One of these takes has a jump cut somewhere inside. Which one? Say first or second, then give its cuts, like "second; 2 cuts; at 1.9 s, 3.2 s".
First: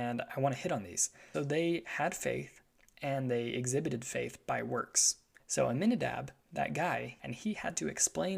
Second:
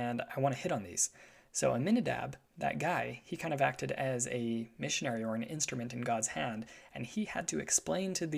first; 3 cuts; at 1.3 s, 5.4 s, 7.2 s